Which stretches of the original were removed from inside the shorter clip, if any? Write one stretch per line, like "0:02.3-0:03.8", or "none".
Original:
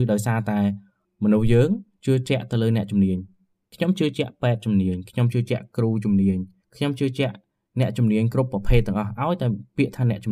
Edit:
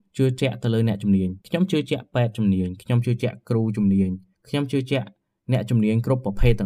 0:03.3-0:03.7